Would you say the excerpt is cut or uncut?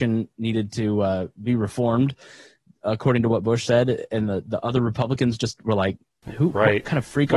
uncut